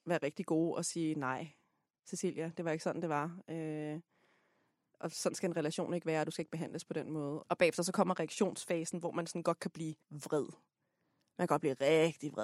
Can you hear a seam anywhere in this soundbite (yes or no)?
yes